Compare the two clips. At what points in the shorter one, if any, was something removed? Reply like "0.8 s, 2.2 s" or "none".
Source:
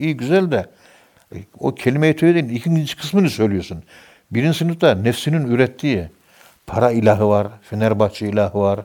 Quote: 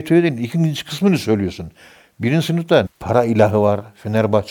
2.9 s